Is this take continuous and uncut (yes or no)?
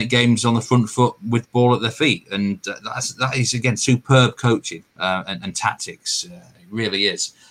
no